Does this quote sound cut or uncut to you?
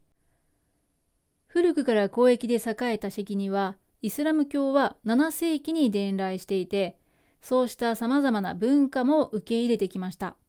cut